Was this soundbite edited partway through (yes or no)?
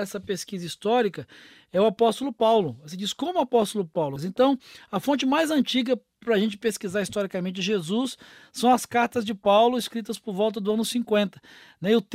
yes